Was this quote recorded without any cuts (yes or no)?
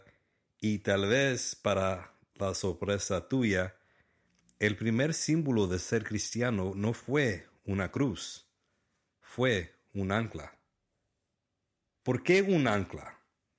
yes